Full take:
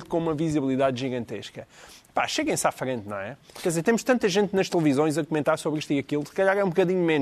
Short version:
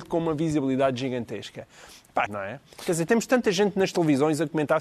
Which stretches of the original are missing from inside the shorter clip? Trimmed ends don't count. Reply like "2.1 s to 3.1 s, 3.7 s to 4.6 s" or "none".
2.3 s to 3.0 s